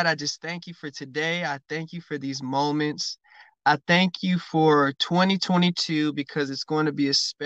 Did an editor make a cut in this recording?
no; 0 cuts

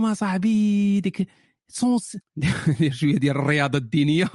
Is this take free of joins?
no; 1 cut; at 2.2 s

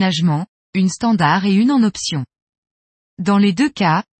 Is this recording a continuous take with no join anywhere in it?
yes; 0 cuts

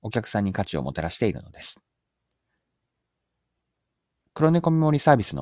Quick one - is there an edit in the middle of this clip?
no; 0 cuts

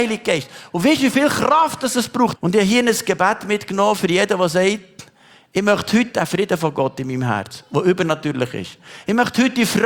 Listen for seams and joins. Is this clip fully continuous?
no; 1 cut; at 2.4 s

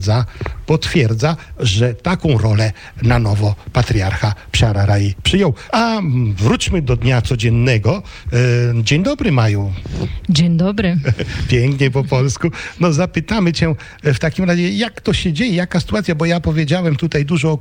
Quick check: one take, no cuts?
no; 1 cut; at 5.7 s

